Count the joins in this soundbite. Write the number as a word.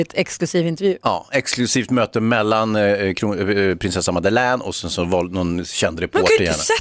zero